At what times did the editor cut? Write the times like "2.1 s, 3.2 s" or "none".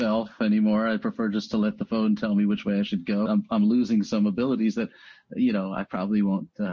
3.3 s